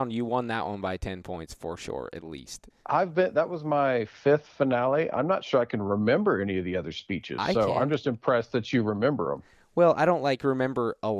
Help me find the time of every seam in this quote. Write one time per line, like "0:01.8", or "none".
0:02.7